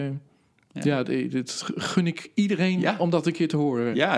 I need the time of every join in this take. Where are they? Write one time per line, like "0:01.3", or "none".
none